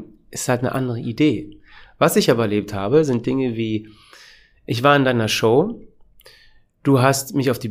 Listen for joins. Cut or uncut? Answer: uncut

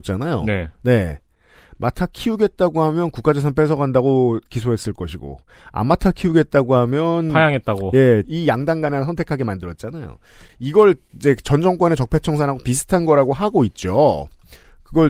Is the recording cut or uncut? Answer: cut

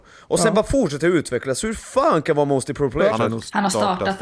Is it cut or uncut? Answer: cut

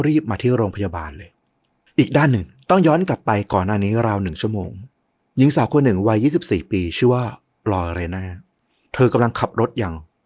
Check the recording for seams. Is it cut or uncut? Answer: uncut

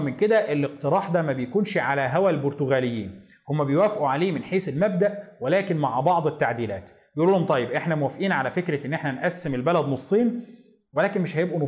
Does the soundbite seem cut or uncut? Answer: uncut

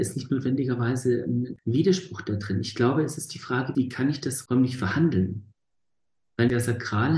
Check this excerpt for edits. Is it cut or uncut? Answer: uncut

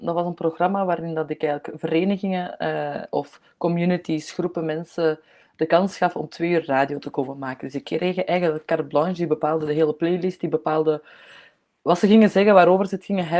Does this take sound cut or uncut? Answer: uncut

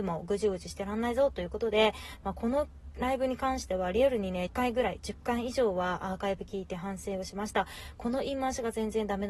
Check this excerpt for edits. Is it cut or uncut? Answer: cut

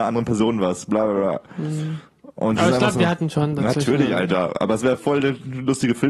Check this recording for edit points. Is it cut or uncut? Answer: uncut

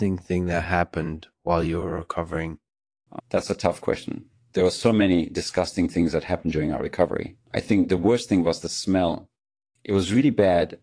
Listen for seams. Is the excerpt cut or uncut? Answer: cut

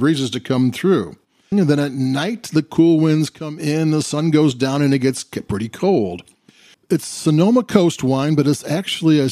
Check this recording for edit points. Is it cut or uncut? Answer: cut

